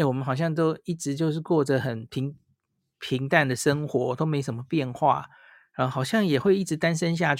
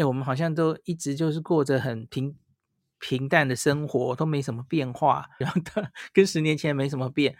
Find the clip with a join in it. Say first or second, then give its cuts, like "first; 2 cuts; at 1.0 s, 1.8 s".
second; 1 cut; at 5.4 s